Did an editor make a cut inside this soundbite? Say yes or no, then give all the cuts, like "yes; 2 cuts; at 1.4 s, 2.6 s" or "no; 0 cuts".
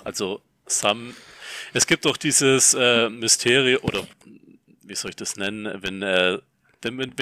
no; 0 cuts